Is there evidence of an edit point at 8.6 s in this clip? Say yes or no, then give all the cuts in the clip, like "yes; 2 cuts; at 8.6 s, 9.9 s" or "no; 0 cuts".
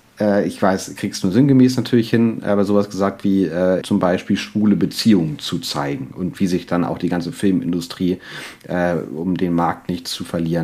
no; 1 cut; at 3.8 s